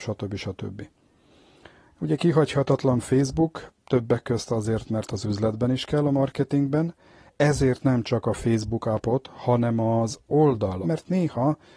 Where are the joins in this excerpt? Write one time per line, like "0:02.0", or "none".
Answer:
0:10.8